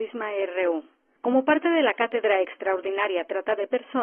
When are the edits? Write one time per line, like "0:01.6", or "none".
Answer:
none